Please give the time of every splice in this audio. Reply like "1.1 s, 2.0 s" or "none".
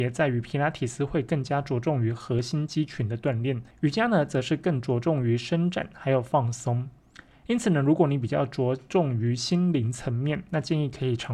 none